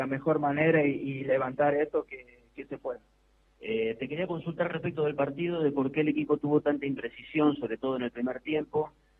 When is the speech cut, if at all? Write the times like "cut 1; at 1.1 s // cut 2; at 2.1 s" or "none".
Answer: cut 1; at 3.5 s